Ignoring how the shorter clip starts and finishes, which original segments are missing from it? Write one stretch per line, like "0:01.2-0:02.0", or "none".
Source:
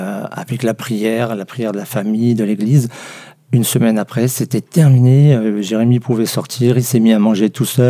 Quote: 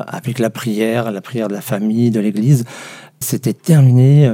0:03.5-0:04.3